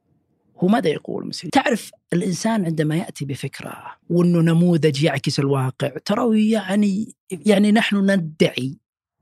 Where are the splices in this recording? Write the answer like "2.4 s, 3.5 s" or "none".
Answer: 1.5 s, 4.0 s